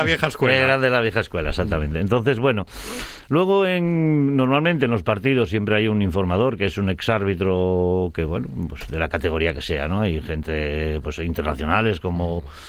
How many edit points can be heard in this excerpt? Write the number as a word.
zero